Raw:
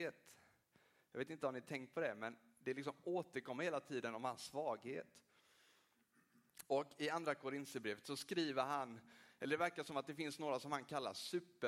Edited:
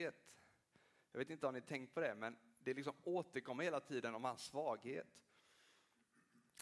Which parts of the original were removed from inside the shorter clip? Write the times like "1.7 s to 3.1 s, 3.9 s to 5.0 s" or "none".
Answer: none